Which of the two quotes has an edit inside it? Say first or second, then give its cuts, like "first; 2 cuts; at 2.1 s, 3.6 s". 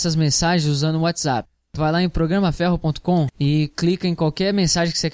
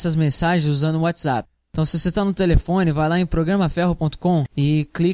first; 1 cut; at 1.8 s